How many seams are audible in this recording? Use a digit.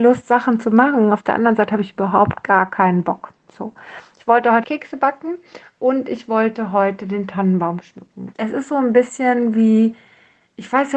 2